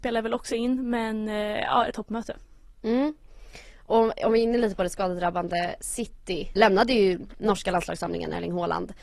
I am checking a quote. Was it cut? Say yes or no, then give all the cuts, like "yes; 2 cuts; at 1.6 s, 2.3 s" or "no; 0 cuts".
yes; 2 cuts; at 1.9 s, 6.6 s